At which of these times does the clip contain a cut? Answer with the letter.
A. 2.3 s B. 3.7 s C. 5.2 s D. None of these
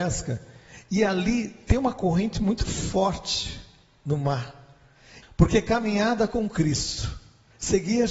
C